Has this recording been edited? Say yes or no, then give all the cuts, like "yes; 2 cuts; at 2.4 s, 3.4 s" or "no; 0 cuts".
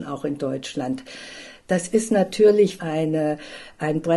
yes; 1 cut; at 2.8 s